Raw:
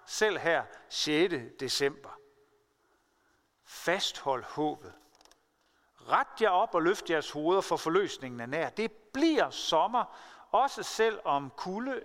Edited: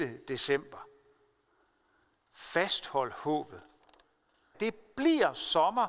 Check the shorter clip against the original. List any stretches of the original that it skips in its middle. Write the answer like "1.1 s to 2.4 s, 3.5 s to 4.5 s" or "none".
5.9 s to 8.7 s